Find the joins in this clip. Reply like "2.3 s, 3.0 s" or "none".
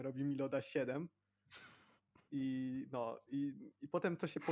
none